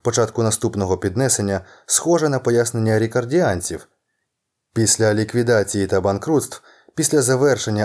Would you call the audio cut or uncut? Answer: uncut